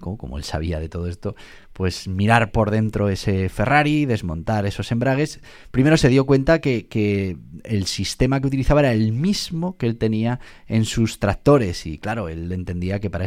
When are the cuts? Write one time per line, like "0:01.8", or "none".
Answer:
none

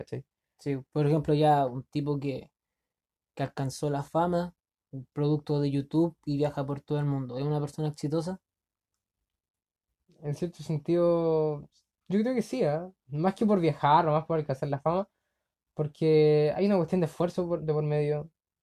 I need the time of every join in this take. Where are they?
none

